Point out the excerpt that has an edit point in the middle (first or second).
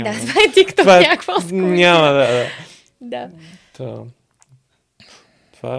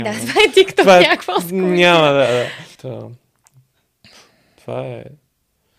second